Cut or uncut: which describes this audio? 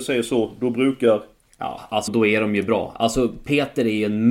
cut